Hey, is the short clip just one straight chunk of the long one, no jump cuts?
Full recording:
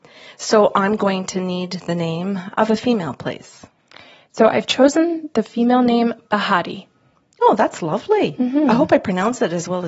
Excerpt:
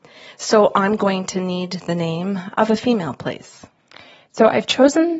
yes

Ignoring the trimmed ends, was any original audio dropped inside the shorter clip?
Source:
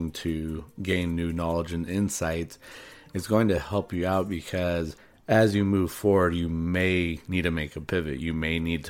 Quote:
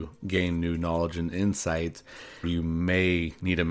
yes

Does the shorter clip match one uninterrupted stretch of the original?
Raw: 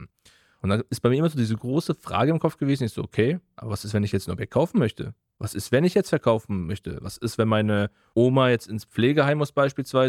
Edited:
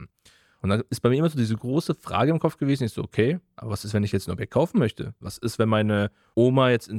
no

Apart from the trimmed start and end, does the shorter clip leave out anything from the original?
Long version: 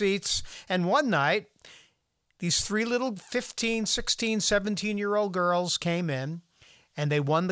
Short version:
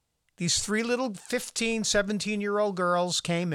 yes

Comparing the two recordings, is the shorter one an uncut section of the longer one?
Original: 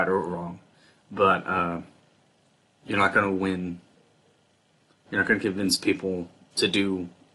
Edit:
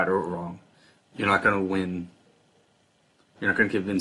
no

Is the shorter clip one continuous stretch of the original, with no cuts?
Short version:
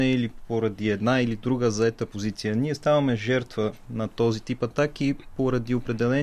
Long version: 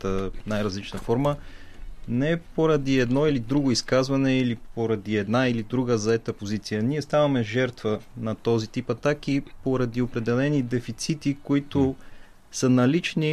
yes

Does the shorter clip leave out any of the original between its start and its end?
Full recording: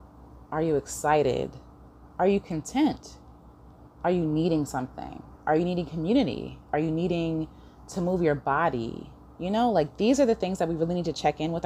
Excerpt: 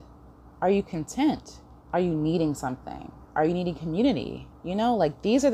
yes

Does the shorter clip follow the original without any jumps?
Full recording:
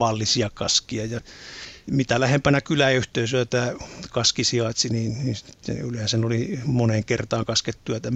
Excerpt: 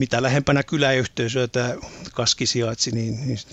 yes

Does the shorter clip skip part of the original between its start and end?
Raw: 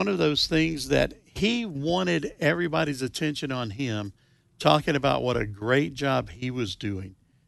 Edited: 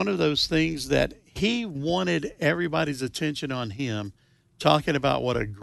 no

